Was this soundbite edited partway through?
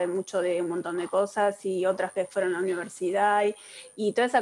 no; 0 cuts

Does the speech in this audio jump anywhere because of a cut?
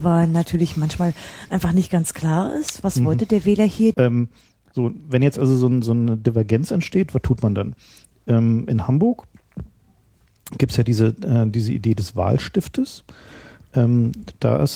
yes; 1 cut; at 3.9 s

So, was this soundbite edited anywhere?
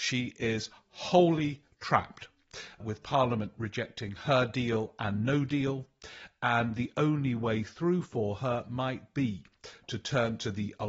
no; 0 cuts

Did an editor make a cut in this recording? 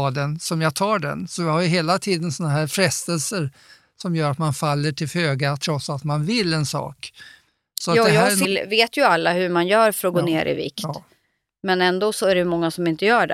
yes; 1 cut; at 8.4 s

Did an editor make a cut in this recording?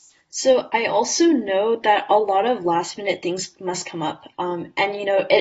yes; 1 cut; at 4.3 s

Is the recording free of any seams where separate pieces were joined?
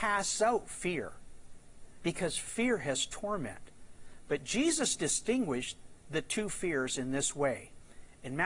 no; 1 cut; at 4.3 s

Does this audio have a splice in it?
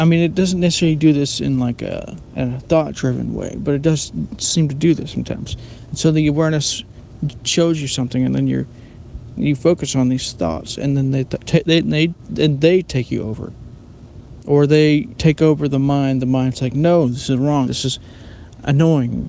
yes; 2 cuts; at 15.2 s, 17.6 s

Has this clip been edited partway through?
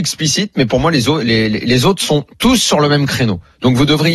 no; 0 cuts

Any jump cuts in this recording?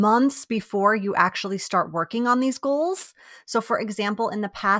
no; 0 cuts

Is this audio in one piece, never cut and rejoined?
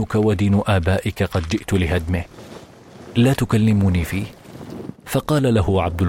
no; 1 cut; at 5.0 s

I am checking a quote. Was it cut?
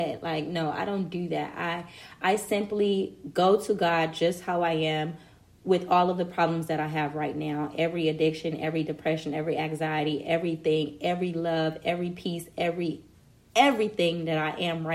no; 0 cuts

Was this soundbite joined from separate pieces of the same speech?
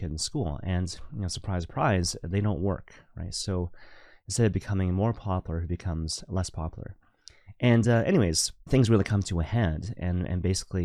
no; 0 cuts

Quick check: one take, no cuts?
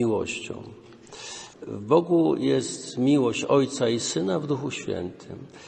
no; 1 cut; at 1.5 s

